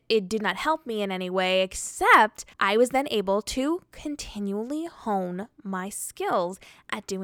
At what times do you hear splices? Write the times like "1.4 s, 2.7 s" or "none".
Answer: 2.5 s